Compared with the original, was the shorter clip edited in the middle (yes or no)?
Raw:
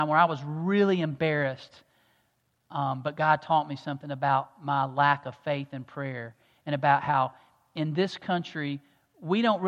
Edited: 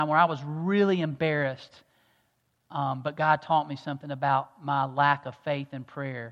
no